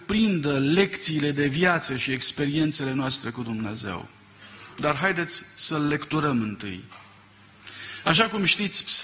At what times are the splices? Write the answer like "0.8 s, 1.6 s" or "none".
8.0 s